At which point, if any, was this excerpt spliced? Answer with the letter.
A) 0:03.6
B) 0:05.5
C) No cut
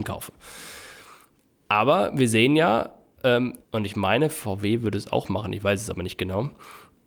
A